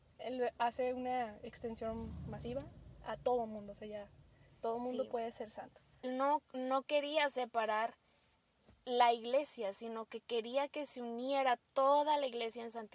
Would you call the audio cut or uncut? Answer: cut